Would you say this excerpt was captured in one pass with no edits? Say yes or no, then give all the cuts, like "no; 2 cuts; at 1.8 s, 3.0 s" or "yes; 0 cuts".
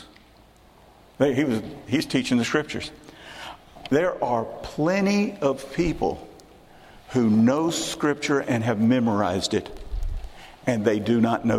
yes; 0 cuts